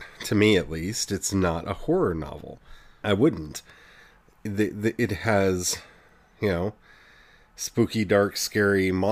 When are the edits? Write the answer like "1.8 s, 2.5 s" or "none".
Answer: 3.0 s

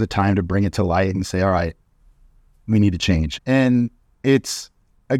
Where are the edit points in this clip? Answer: 3.4 s

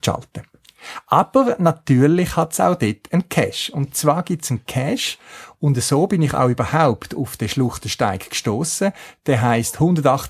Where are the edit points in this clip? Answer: none

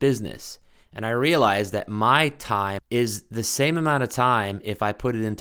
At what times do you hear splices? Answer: 2.8 s

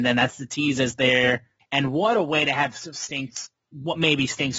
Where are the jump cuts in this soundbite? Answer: 1.6 s

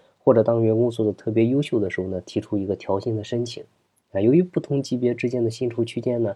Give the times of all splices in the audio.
none

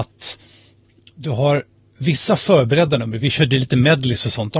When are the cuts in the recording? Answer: none

